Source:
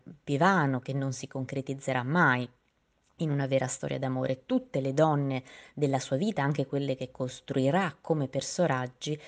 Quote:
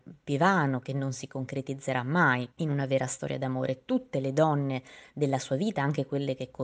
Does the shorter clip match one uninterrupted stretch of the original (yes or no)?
no